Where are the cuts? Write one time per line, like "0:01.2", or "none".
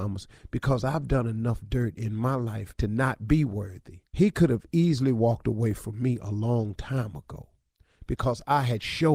0:02.7
0:04.1